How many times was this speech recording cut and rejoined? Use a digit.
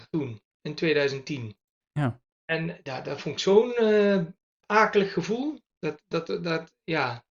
0